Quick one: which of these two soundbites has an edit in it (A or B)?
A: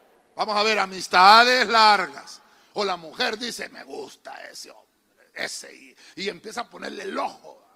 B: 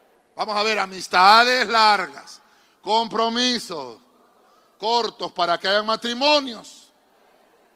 A